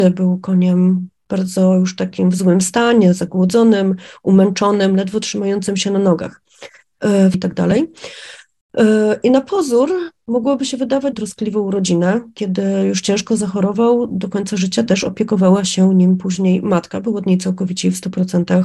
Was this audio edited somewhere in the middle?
yes; 2 cuts; at 7.3 s, 11.1 s

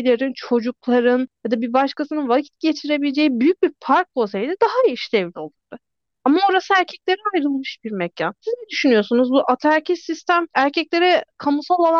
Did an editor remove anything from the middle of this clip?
no; 0 cuts

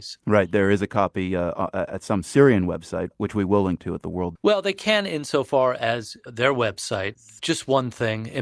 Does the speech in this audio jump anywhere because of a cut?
yes; 2 cuts; at 4.4 s, 7.4 s

